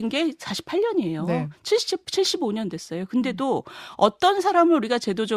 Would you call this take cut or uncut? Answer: uncut